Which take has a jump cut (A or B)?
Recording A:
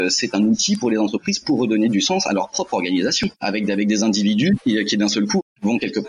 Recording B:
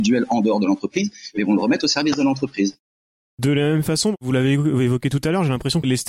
A